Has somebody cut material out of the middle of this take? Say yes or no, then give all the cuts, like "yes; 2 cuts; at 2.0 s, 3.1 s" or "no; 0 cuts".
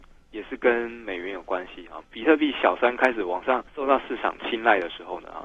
yes; 2 cuts; at 2.0 s, 3.7 s